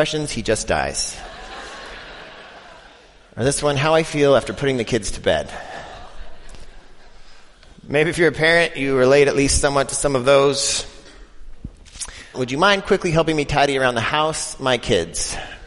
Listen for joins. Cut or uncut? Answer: cut